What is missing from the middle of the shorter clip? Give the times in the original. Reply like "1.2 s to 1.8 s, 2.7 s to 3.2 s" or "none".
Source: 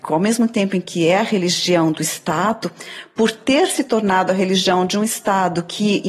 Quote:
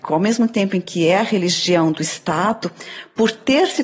none